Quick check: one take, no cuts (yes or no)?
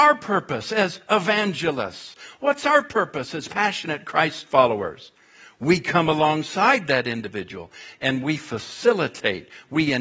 yes